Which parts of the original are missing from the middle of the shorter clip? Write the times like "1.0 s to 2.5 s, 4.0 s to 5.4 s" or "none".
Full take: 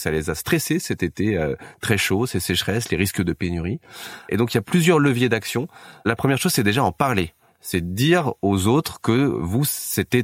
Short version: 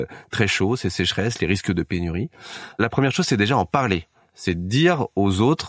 4.2 s to 6.0 s